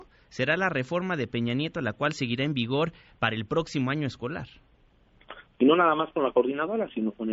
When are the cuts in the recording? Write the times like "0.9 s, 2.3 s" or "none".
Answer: 5.5 s